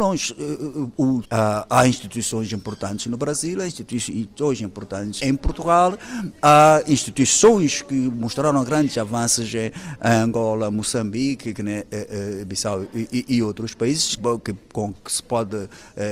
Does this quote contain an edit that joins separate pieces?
yes; 3 cuts; at 1.2 s, 5.2 s, 14.2 s

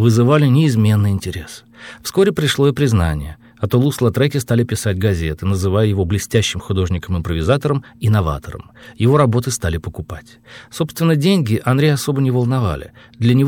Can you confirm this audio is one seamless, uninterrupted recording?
yes; 0 cuts

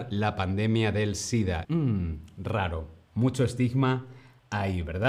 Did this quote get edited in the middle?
yes; 1 cut; at 1.6 s

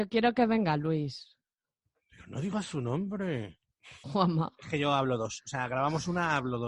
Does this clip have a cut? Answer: yes; 1 cut; at 4.0 s

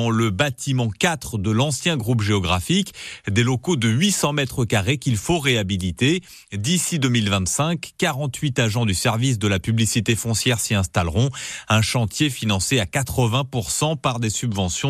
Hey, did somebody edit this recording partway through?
no; 0 cuts

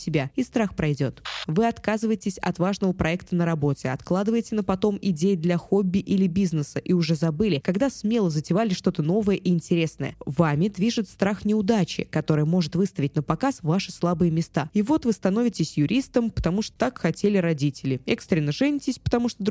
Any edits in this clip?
yes; 2 cuts; at 1.5 s, 14.7 s

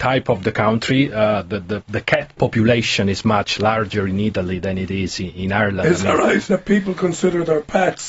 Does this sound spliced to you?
yes; 2 cuts; at 4.6 s, 6.5 s

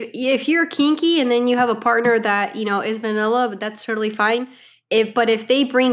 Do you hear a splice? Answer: no; 0 cuts

